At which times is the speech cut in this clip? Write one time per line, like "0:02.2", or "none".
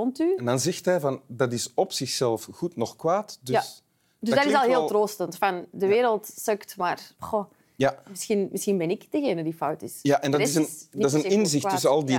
0:07.1